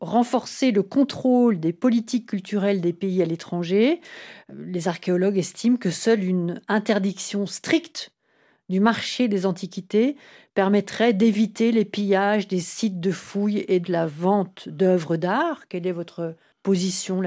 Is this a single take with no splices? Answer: no; 1 cut; at 13.8 s

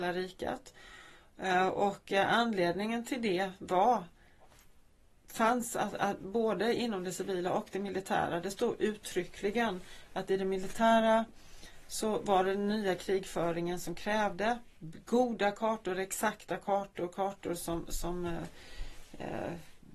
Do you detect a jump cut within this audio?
no; 0 cuts

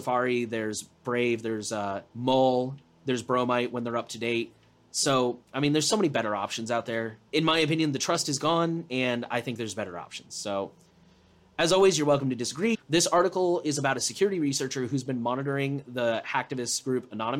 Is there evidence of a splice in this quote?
yes; 2 cuts; at 7.3 s, 12.7 s

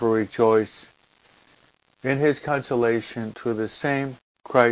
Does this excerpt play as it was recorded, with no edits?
yes; 0 cuts

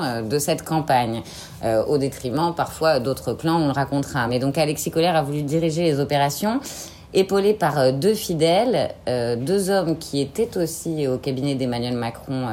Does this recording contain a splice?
no; 0 cuts

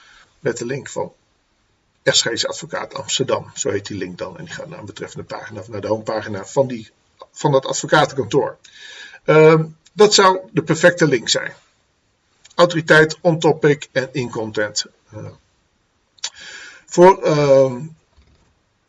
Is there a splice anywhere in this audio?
no; 0 cuts

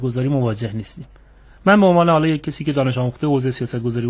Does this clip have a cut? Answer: no; 0 cuts

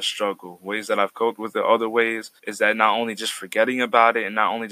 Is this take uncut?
no; 1 cut; at 2.4 s

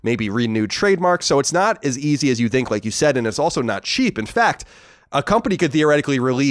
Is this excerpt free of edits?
yes; 0 cuts

